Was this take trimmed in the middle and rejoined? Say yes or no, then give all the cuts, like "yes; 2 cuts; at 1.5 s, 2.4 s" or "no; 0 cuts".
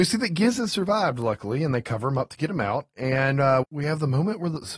yes; 1 cut; at 3.6 s